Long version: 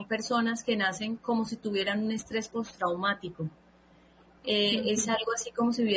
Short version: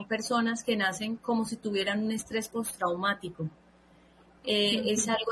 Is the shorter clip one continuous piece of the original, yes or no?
yes